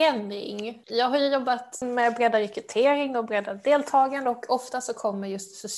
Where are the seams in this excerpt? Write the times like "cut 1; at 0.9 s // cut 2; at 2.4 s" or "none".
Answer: cut 1; at 1.8 s